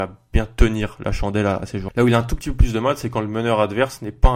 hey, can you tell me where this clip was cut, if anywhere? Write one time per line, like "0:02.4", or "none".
0:01.9